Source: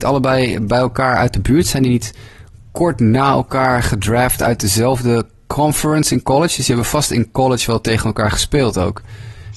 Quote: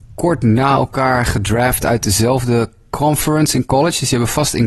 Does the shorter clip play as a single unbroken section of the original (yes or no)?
yes